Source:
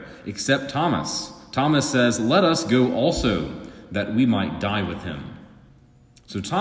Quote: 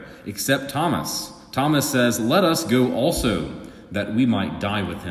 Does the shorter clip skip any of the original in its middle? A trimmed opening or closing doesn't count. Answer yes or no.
no